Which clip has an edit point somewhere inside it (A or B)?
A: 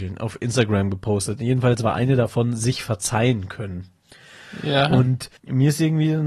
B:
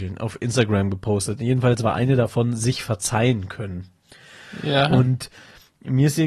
A